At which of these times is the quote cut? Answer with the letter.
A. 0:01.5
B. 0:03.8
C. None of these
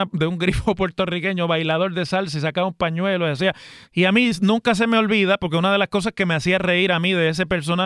B